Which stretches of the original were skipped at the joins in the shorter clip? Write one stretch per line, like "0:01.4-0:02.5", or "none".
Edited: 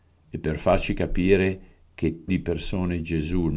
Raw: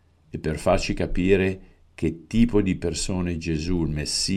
0:02.3-0:02.6